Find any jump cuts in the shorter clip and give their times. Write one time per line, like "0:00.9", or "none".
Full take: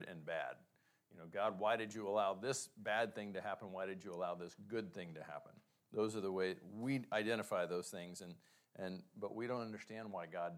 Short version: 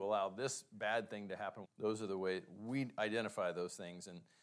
0:01.6